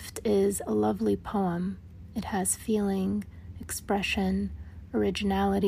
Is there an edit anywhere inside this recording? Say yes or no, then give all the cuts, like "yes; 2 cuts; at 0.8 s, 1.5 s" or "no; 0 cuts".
no; 0 cuts